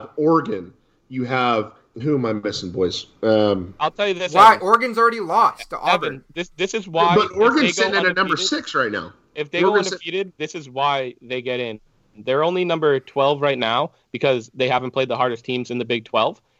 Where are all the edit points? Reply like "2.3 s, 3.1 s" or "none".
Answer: 1.9 s

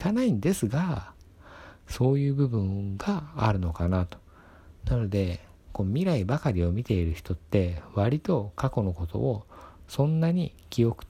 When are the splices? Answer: 4.8 s

